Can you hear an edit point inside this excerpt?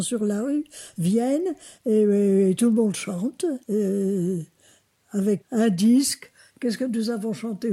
yes; 2 cuts; at 3.6 s, 5.4 s

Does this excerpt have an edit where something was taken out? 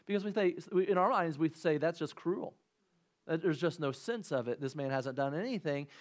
no; 0 cuts

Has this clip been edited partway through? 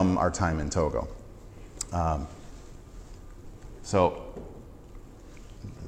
no; 0 cuts

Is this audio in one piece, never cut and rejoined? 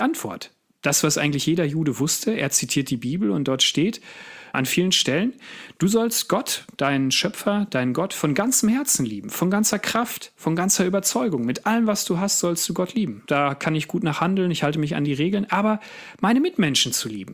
no; 2 cuts; at 4.5 s, 13.3 s

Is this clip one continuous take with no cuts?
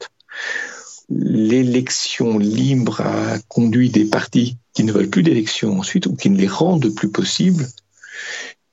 no; 2 cuts; at 1.0 s, 4.6 s

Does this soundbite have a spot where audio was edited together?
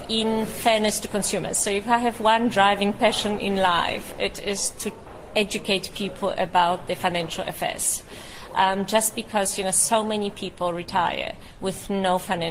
no; 0 cuts

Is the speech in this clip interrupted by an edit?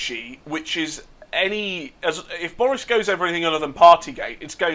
no; 0 cuts

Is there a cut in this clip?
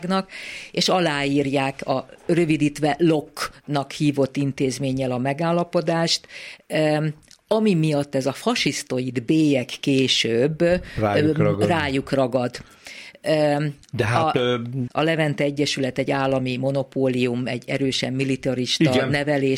yes; 2 cuts; at 13.8 s, 14.9 s

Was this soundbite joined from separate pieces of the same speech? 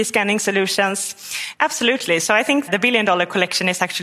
yes; 2 cuts; at 1.5 s, 2.7 s

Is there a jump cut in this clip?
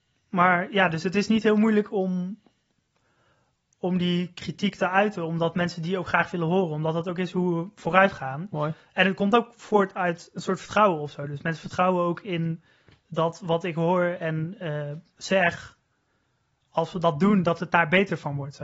no; 0 cuts

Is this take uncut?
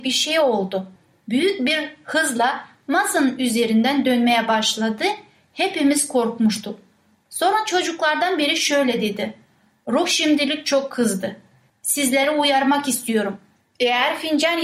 no; 1 cut; at 1.2 s

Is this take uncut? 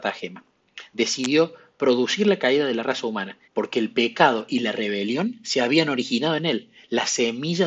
no; 1 cut; at 3.4 s

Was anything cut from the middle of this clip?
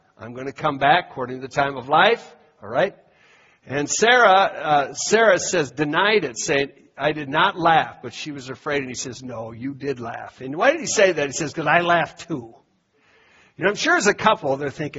no; 0 cuts

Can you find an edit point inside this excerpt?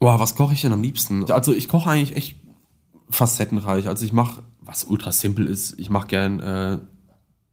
yes; 1 cut; at 1.3 s

